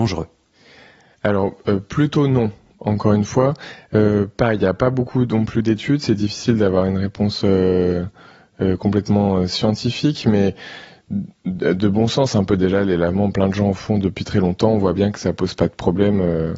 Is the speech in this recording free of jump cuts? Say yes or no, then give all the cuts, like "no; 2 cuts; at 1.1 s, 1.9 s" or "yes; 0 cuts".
yes; 0 cuts